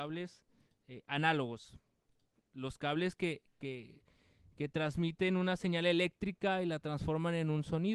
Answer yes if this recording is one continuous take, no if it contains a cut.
yes